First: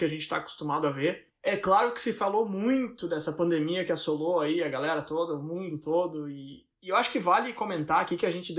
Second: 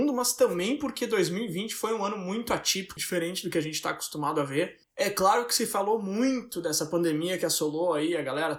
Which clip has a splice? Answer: second; 1 cut; at 3.0 s

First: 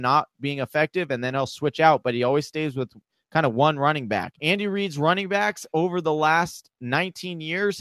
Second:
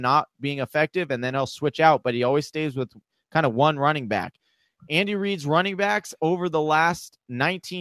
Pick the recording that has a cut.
first; 1 cut; at 4.4 s

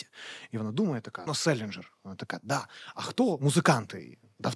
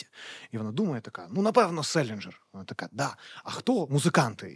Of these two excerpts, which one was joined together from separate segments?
first; 1 cut; at 1.3 s

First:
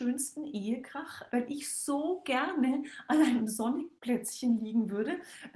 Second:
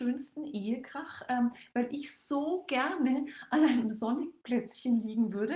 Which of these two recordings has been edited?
first; 1 cut; at 1.3 s

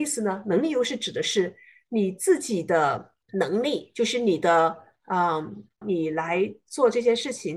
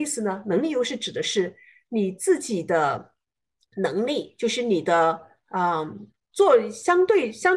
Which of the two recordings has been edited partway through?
first; 2 cuts; at 3.2 s, 5.8 s

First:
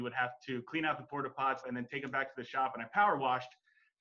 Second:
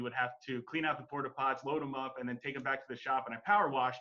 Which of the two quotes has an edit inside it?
first; 1 cut; at 1.6 s

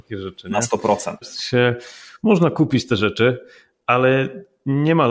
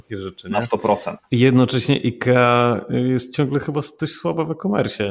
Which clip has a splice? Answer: first; 1 cut; at 1.2 s

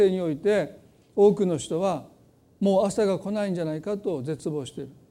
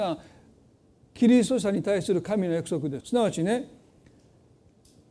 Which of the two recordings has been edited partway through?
second; 1 cut; at 3.0 s

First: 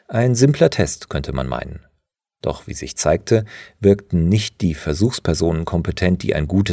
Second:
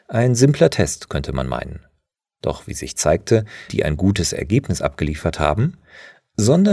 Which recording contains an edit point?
second; 1 cut; at 3.7 s

